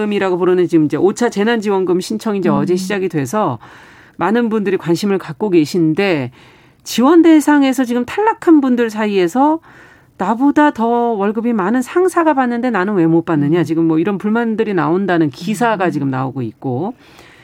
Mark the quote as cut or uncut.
uncut